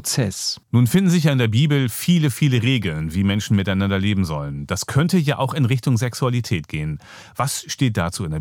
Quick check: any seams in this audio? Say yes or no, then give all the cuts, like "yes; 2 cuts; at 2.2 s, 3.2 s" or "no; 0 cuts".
no; 0 cuts